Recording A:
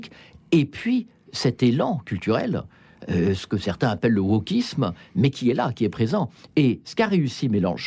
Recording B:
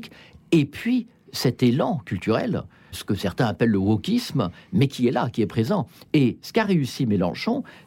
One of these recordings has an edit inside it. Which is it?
B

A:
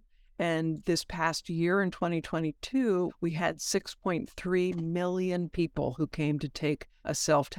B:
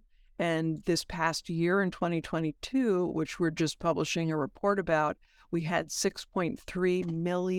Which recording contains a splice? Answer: A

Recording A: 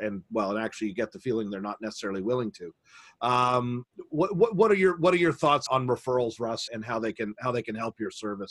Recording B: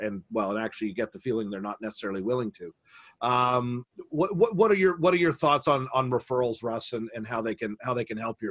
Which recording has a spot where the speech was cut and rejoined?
A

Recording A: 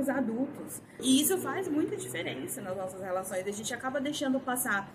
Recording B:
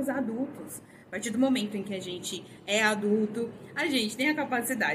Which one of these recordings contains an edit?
A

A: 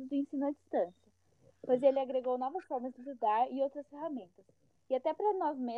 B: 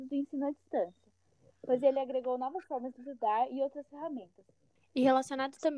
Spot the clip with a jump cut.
B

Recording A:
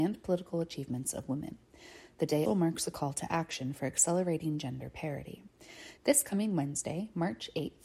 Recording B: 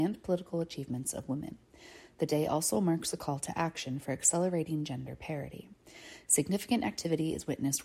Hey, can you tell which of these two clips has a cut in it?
A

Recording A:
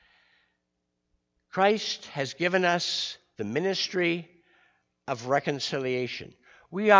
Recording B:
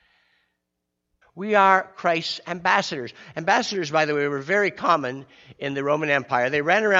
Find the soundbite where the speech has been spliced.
B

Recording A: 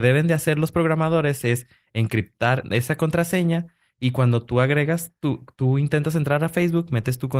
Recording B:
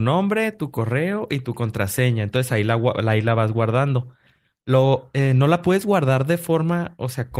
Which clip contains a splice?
A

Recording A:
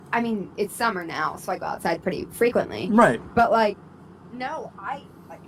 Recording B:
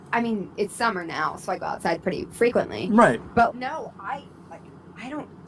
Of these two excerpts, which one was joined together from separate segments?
B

